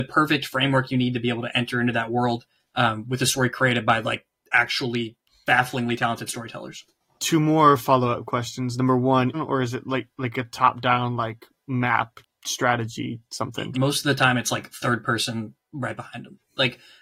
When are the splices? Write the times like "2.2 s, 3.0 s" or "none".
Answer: 9.3 s, 13.7 s